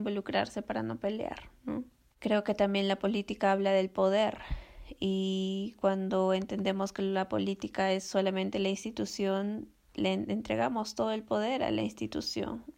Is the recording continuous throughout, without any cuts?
no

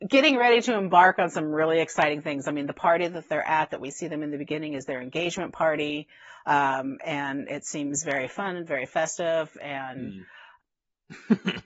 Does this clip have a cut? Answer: yes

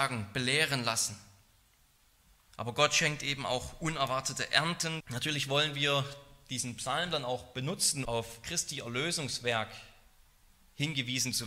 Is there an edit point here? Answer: yes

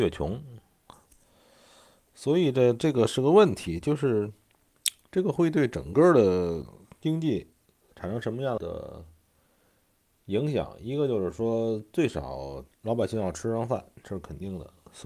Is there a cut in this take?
yes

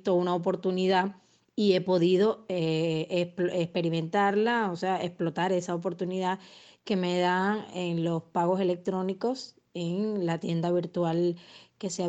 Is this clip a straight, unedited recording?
yes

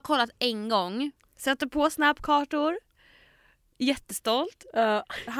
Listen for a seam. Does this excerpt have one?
yes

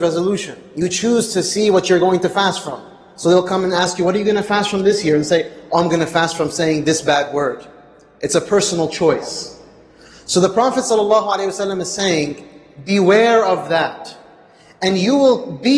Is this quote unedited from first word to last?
yes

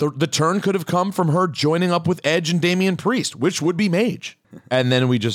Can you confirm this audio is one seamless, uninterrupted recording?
no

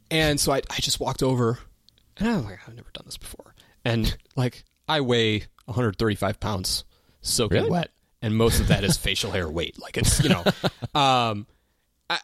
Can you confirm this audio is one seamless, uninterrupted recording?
yes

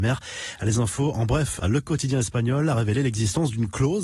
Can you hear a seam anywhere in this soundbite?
yes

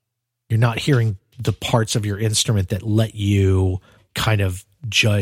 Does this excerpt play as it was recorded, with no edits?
yes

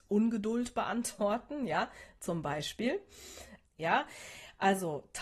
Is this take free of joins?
no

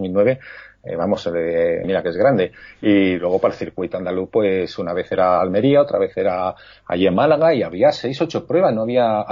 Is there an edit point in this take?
yes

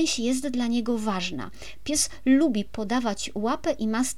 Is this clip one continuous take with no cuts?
yes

